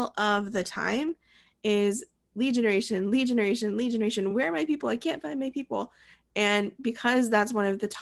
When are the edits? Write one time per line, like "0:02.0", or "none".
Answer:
none